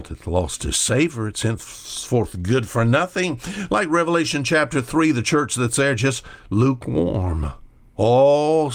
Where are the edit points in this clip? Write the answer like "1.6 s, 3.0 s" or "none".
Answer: none